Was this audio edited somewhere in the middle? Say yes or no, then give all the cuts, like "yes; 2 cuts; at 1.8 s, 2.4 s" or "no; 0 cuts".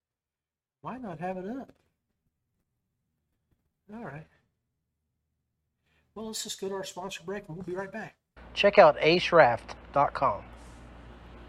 yes; 1 cut; at 8.4 s